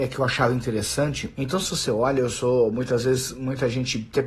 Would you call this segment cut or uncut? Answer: cut